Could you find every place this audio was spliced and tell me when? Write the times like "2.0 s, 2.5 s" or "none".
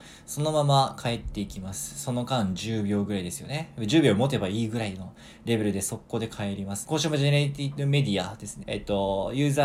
6.8 s, 8.6 s